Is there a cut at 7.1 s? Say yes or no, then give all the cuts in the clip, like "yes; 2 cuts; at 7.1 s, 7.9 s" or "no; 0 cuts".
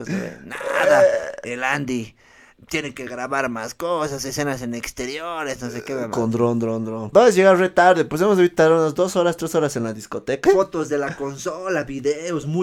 yes; 2 cuts; at 7.1 s, 10.5 s